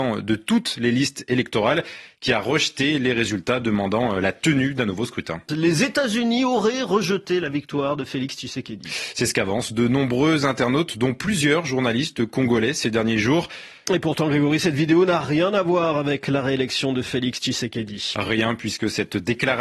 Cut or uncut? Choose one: cut